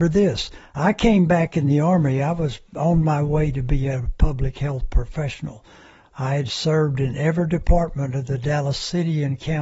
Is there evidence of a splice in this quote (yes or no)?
no